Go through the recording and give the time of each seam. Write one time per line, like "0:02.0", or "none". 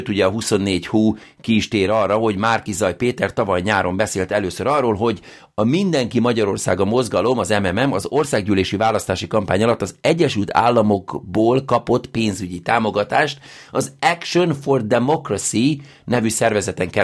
none